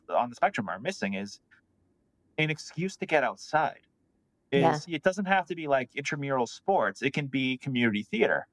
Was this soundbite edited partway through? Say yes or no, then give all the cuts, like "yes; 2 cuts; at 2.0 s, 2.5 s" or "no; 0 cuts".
no; 0 cuts